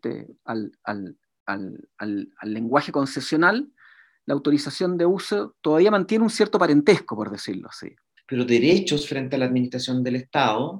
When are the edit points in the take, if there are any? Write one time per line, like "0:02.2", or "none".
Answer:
0:08.2